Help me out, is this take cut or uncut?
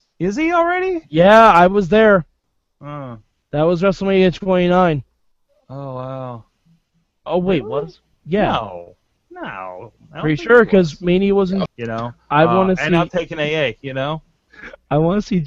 cut